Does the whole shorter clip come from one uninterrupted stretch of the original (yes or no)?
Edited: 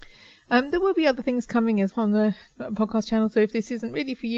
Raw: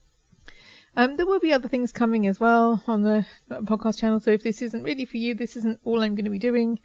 no